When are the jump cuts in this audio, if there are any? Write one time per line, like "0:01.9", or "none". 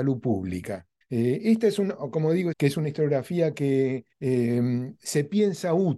0:01.0
0:02.5
0:04.1